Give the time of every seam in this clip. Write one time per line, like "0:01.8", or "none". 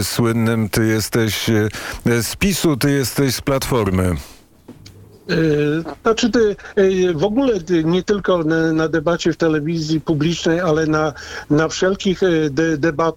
none